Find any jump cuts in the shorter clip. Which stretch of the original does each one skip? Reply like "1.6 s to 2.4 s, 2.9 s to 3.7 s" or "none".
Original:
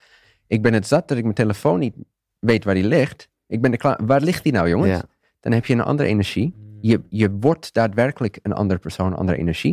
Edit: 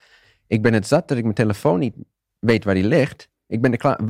none